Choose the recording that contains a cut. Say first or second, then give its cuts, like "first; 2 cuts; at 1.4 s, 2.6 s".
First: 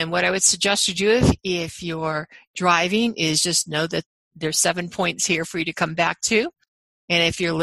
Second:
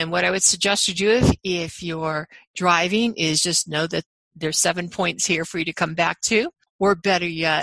second; 1 cut; at 6.7 s